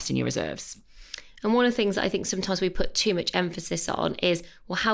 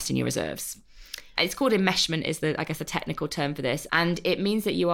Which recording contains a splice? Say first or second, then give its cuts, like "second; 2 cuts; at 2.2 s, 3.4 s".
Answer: second; 2 cuts; at 1.4 s, 3.9 s